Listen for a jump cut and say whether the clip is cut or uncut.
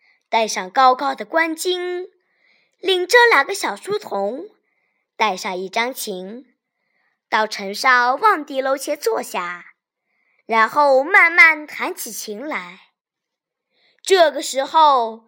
cut